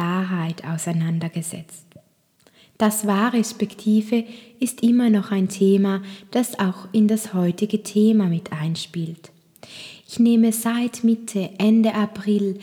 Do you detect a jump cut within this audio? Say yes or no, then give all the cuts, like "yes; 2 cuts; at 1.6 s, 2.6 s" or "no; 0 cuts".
no; 0 cuts